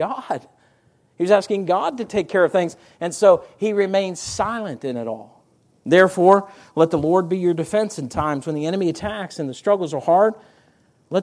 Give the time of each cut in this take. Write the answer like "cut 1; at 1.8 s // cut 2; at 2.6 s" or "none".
cut 1; at 5.8 s